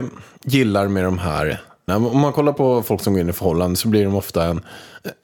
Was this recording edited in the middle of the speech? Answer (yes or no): yes